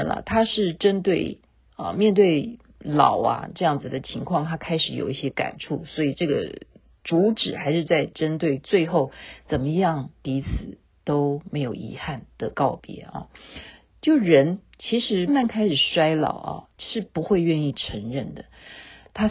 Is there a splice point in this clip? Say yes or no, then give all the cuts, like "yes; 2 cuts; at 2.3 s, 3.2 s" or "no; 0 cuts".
yes; 2 cuts; at 15.3 s, 16.7 s